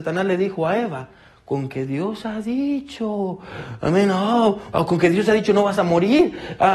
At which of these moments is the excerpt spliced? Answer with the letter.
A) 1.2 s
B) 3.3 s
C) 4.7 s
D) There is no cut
C